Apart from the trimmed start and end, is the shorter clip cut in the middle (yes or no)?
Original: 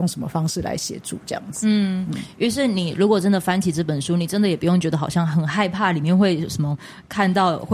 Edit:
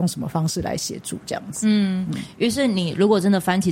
no